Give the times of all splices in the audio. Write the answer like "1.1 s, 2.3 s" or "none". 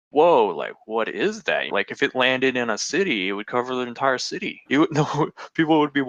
1.7 s, 4.7 s